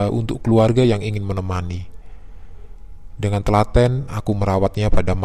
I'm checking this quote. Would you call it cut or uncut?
uncut